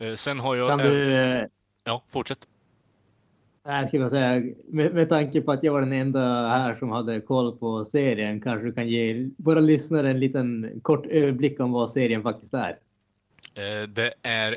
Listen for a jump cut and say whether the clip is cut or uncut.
uncut